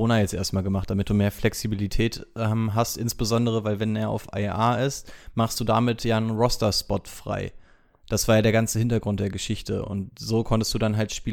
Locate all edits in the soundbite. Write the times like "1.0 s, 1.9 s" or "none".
none